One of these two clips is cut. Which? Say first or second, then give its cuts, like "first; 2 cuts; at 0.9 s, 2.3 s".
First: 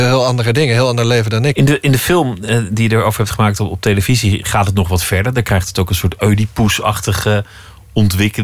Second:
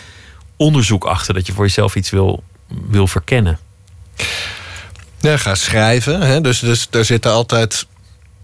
first; 1 cut; at 1.5 s